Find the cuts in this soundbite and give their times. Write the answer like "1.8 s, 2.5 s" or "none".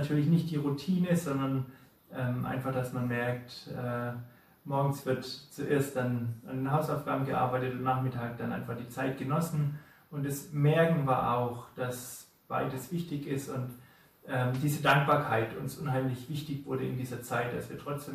none